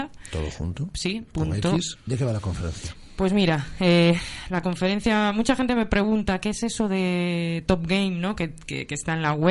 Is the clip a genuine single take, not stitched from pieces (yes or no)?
no